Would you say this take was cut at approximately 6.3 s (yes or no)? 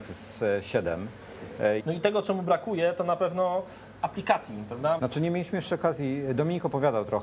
no